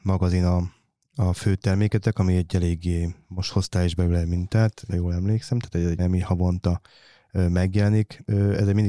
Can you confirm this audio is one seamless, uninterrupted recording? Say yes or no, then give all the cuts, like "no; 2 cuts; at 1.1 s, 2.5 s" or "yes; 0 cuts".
no; 2 cuts; at 4.9 s, 6.0 s